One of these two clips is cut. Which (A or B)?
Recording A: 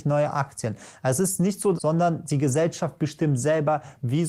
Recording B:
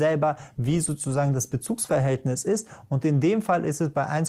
A